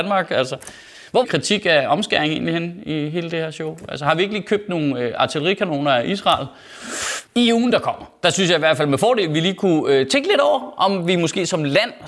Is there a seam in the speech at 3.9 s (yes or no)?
no